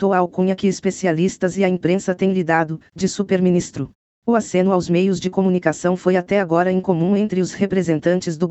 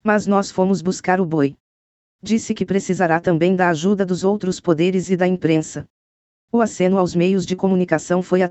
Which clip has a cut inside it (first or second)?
first